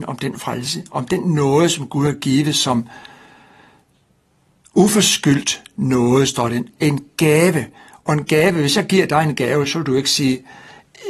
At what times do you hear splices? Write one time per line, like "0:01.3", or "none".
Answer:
none